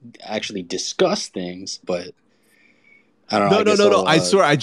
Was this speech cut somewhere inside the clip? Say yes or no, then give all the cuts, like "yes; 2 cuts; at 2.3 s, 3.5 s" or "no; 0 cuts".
yes; 1 cut; at 1.8 s